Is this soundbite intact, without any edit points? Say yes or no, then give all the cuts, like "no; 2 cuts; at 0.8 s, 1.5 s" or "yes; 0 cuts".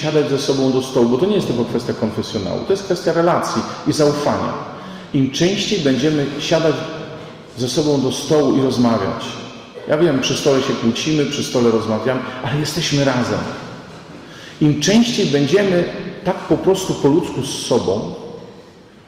yes; 0 cuts